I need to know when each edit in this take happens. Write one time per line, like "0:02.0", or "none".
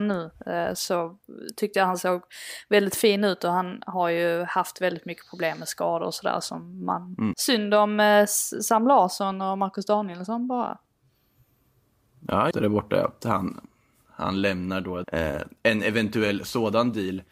0:07.3
0:12.5
0:15.0

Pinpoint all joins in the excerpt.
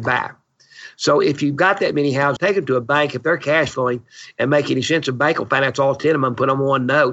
0:02.4

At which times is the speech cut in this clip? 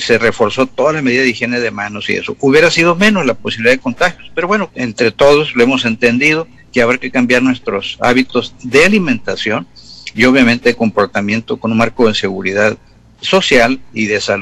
0:04.7

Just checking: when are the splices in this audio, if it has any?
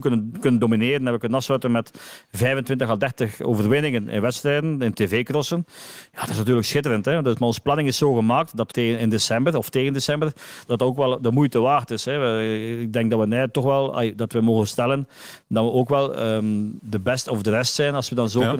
0:08.7
0:10.7
0:16.8

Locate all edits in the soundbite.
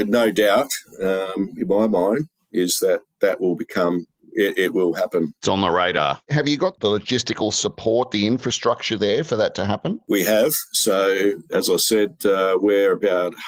none

